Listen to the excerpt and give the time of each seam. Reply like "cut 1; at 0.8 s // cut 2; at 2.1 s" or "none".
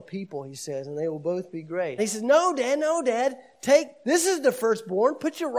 cut 1; at 2.0 s